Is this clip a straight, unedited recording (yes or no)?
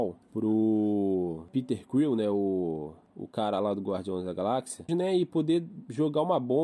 no